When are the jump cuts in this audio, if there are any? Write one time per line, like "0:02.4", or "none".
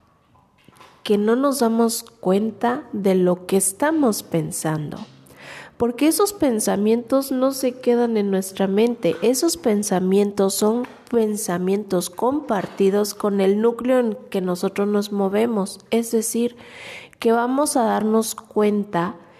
none